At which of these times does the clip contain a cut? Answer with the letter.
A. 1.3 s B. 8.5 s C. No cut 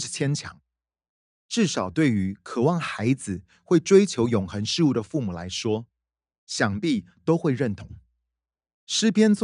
A